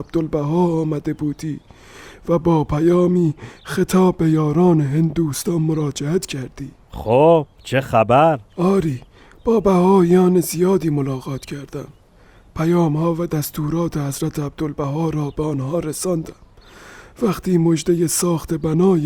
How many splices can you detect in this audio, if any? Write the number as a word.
one